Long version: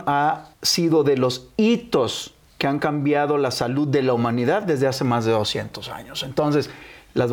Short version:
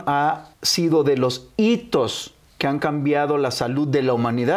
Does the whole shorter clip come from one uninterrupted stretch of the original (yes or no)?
yes